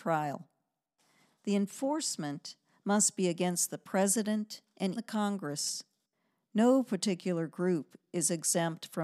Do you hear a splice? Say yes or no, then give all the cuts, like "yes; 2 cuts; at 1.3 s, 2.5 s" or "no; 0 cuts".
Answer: yes; 1 cut; at 5.0 s